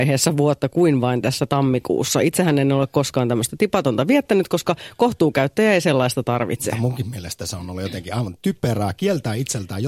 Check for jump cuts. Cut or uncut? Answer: uncut